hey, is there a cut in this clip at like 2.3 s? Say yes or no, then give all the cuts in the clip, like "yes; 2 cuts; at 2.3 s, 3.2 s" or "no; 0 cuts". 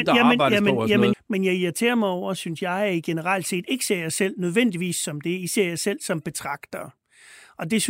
no; 1 cut; at 1.1 s